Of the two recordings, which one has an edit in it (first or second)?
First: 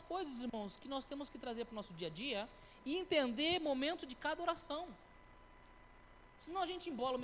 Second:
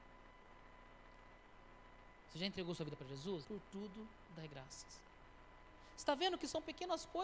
second